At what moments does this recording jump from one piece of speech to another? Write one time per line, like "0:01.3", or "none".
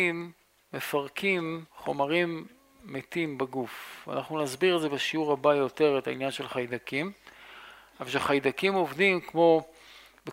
0:01.7